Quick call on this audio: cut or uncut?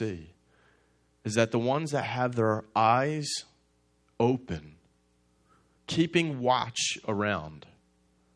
cut